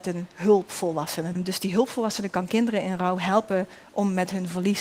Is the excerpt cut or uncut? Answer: cut